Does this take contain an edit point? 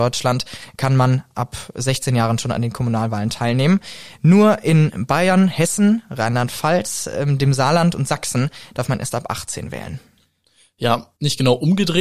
no; 0 cuts

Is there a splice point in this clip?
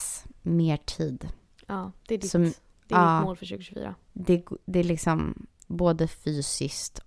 yes; 1 cut; at 5.6 s

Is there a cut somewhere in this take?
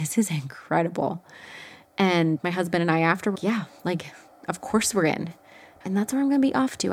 yes; 2 cuts; at 3.3 s, 5.8 s

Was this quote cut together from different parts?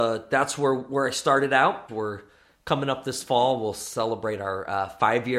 yes; 1 cut; at 1.9 s

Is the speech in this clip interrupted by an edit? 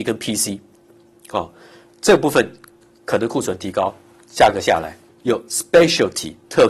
yes; 1 cut; at 5.1 s

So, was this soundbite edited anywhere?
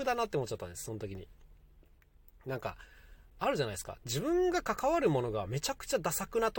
no; 0 cuts

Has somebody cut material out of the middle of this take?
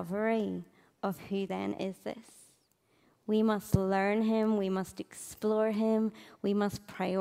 no; 0 cuts

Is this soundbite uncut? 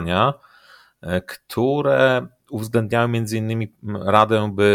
yes; 0 cuts

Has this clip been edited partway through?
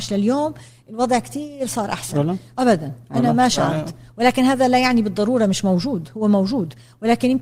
yes; 1 cut; at 2.5 s

